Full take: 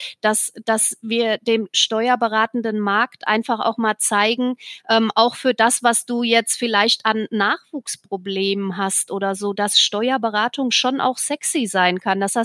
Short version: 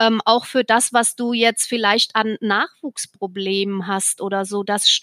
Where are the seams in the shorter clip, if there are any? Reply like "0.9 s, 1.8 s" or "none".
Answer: none